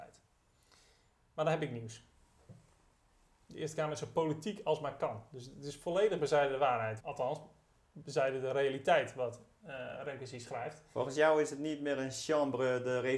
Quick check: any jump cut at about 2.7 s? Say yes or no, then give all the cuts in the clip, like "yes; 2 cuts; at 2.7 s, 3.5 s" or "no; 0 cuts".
no; 1 cut; at 7.0 s